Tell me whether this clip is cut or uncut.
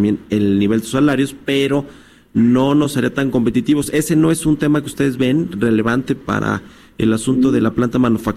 uncut